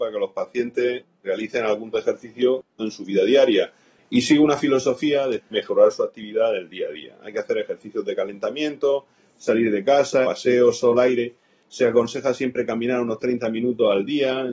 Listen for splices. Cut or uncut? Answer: cut